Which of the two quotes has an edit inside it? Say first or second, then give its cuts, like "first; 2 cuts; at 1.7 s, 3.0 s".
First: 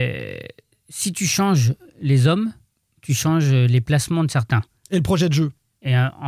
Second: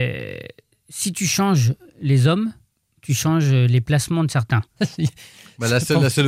second; 1 cut; at 4.8 s